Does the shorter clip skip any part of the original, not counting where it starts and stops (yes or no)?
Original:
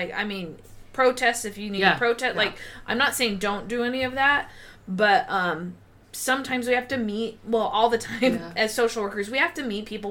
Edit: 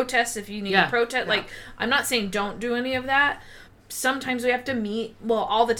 yes